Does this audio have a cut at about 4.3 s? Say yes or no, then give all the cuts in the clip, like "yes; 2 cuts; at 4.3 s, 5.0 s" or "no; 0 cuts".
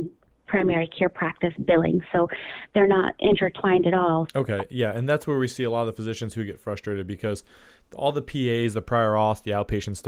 yes; 1 cut; at 4.3 s